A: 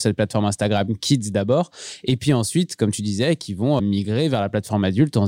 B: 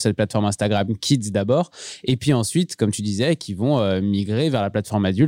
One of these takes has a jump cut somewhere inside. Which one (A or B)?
A